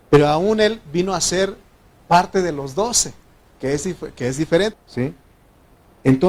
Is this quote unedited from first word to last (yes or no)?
no